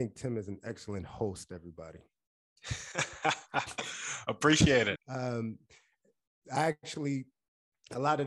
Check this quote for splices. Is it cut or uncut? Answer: cut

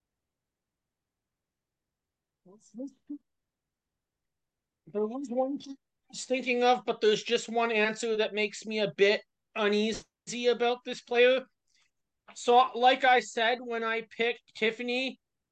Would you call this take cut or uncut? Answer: uncut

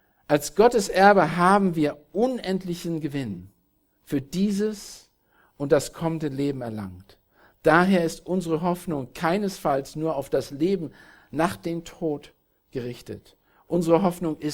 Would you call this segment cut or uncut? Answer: uncut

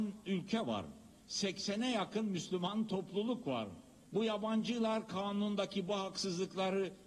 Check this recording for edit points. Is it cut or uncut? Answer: cut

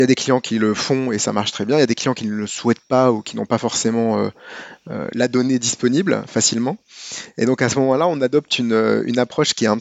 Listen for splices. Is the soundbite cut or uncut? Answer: uncut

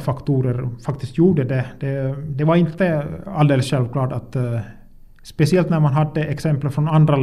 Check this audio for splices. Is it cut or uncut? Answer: uncut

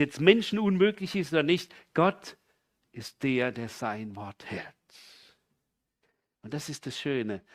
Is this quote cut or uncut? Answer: cut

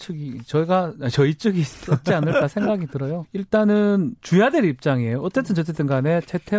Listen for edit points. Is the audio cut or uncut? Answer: cut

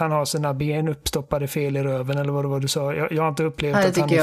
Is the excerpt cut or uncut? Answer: uncut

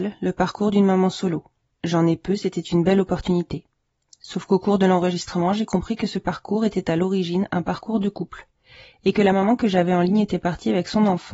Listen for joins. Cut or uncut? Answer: uncut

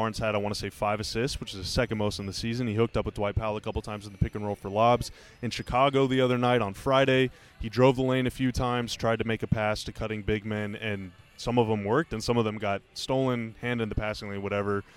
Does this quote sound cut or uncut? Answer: uncut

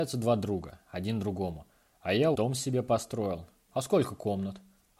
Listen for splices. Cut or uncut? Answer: cut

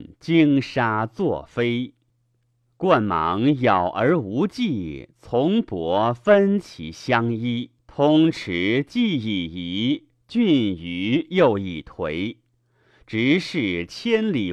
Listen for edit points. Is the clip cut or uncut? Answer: cut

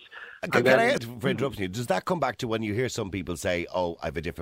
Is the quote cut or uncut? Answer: cut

